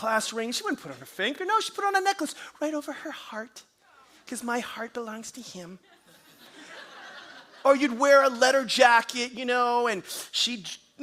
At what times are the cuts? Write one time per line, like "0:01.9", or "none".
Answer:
none